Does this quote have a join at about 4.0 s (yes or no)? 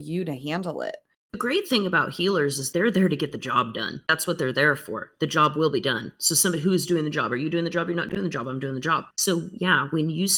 no